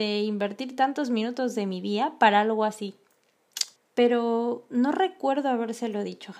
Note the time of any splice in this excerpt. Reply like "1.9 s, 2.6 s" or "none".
3.8 s